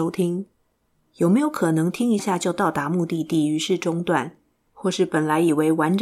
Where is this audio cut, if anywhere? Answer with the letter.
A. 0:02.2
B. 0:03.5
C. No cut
A